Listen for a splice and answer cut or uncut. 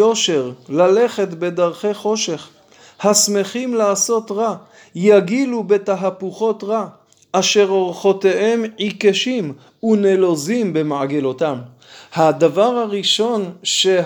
uncut